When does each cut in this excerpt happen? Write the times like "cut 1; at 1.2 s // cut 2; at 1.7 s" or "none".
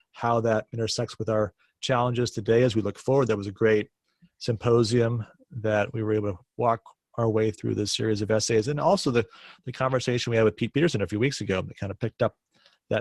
none